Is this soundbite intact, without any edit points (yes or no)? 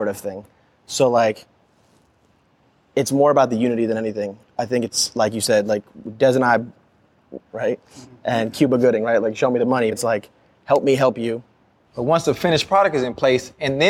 no